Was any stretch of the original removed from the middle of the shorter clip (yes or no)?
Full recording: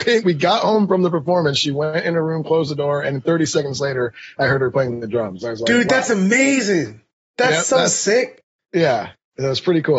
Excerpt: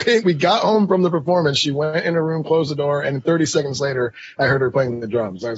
no